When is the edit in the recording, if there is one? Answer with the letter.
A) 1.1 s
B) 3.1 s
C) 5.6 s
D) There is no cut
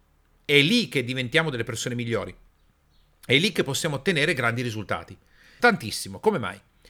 C